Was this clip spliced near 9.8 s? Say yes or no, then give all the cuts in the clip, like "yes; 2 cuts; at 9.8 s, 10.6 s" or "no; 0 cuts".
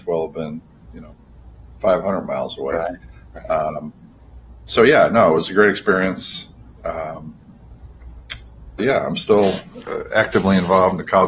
yes; 2 cuts; at 8.8 s, 9.8 s